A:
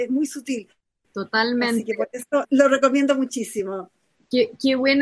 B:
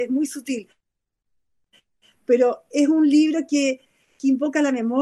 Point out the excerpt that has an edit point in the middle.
A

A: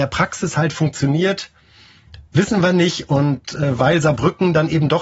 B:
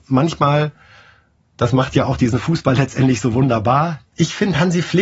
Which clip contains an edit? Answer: B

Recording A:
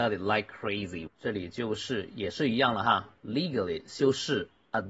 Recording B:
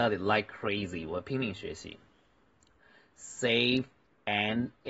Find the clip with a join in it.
A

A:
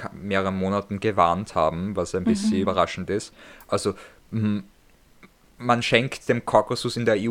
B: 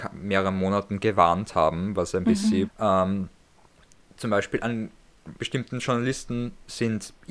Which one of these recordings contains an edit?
B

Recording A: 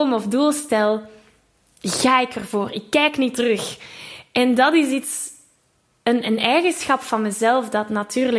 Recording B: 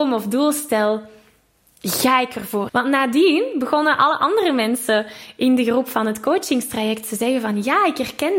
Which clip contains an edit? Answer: B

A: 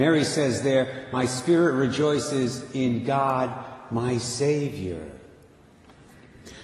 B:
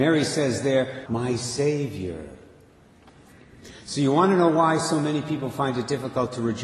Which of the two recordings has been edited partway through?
B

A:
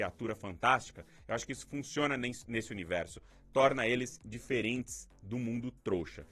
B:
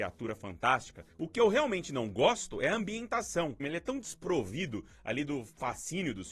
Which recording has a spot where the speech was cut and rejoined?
B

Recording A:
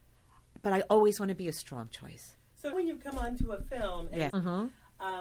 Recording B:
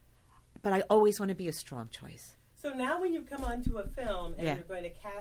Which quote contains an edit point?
A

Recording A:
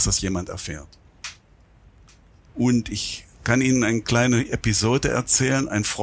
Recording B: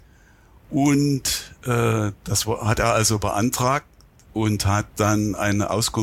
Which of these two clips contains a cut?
A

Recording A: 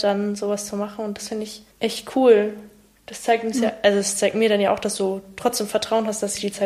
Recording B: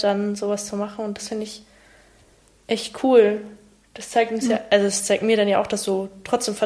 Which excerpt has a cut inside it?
A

